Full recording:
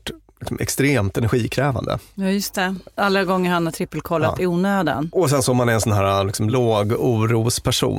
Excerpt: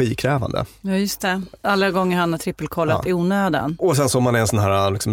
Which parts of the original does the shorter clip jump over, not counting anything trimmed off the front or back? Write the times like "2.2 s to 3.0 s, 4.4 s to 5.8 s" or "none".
none